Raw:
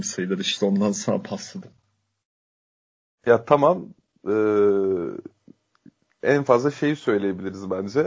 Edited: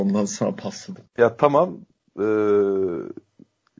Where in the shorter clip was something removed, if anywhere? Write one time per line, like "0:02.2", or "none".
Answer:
0:01.1

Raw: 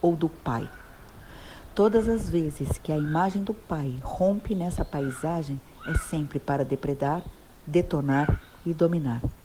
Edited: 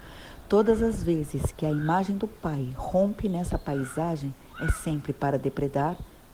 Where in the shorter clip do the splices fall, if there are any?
none

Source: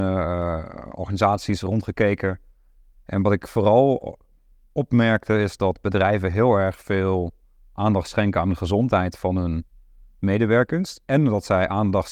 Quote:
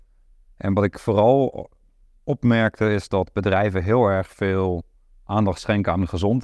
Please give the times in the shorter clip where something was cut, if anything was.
none

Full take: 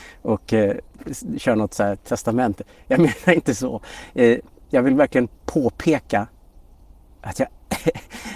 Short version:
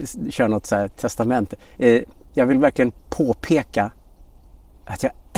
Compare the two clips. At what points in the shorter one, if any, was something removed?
0:01.8

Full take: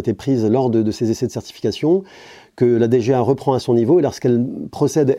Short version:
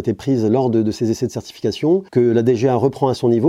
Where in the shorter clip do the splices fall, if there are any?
0:02.1

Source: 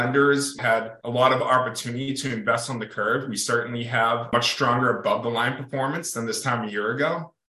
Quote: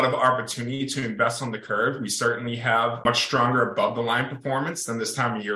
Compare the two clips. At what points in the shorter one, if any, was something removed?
none

